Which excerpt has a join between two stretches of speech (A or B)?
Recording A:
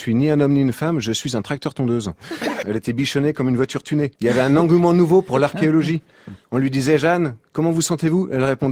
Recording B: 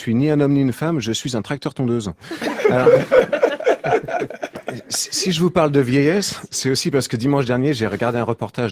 A